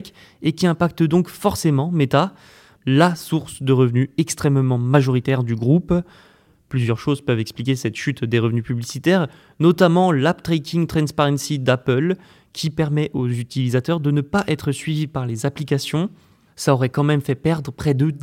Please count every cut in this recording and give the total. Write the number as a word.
one